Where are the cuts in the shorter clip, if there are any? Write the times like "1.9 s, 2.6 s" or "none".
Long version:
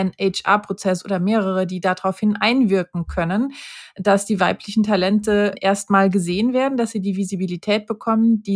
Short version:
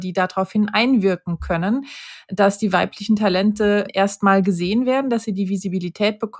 none